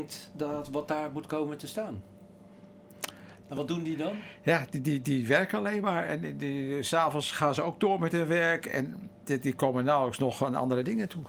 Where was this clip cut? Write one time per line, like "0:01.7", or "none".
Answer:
0:03.4